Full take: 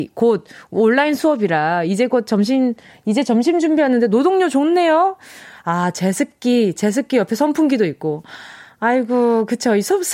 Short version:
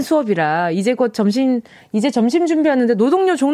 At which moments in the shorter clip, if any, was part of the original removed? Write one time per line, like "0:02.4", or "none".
none